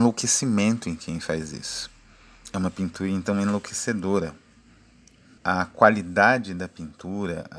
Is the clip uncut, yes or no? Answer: no